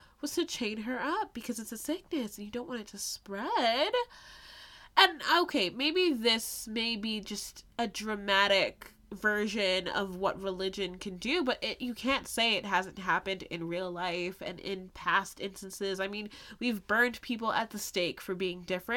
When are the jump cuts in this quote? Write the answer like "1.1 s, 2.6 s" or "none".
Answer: 7.7 s